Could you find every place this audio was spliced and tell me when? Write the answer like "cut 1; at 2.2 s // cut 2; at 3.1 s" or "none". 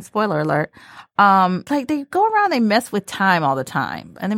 cut 1; at 1.7 s